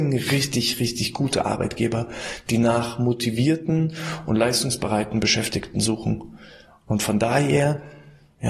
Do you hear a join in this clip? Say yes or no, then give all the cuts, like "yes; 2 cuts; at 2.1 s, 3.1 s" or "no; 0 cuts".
no; 0 cuts